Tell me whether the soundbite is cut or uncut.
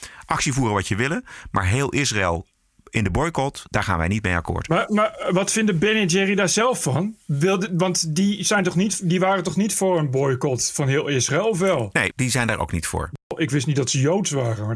cut